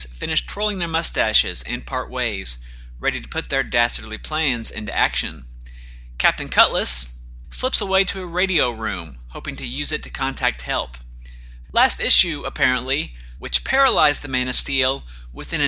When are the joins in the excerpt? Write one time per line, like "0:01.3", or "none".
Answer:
0:07.4
0:11.6
0:13.4